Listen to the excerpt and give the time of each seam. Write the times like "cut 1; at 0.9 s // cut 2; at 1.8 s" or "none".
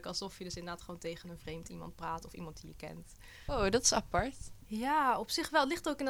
cut 1; at 3.5 s // cut 2; at 4.6 s